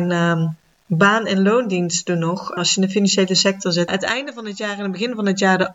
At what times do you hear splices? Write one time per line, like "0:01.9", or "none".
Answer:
0:02.6
0:03.9